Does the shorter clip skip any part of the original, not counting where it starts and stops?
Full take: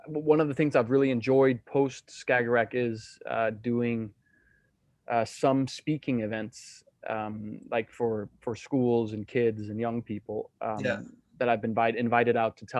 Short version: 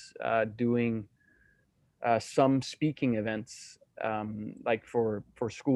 no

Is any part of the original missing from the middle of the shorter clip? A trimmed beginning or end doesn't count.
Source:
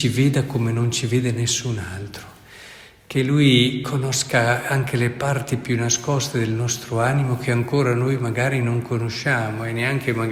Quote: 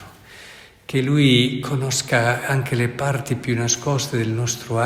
no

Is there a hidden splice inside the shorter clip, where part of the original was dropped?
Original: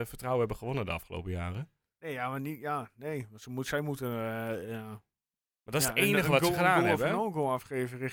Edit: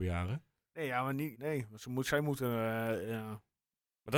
yes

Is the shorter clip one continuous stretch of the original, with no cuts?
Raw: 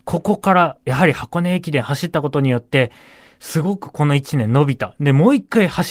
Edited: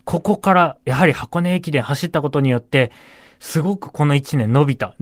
yes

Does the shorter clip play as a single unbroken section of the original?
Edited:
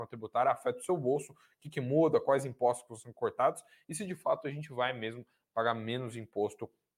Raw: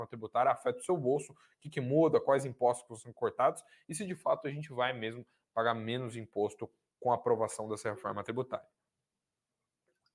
yes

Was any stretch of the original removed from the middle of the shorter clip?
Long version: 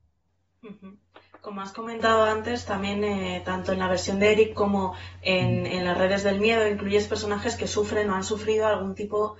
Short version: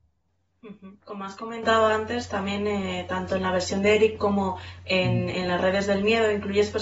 yes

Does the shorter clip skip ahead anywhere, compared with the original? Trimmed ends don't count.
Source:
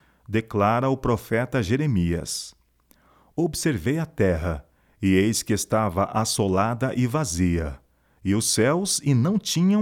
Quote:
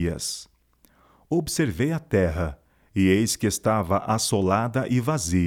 no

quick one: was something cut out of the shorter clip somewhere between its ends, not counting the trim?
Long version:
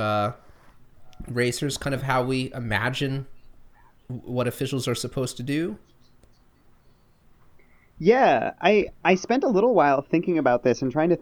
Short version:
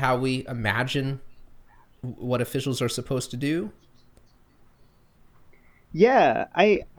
no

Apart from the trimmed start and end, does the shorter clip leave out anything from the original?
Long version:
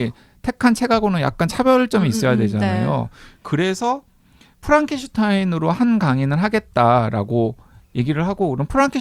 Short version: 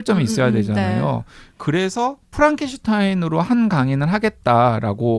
yes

